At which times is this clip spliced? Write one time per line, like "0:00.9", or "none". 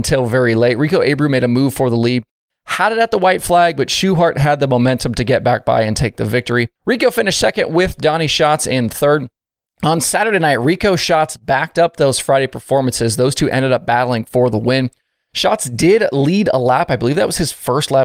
0:06.8